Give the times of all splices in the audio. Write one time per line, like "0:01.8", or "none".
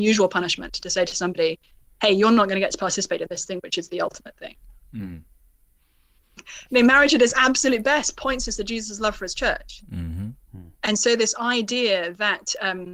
0:06.4